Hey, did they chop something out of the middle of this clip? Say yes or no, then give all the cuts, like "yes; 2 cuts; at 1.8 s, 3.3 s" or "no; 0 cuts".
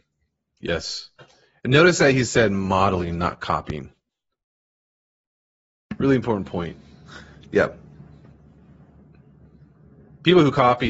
no; 0 cuts